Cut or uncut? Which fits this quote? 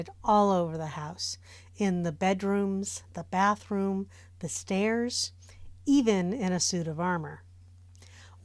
uncut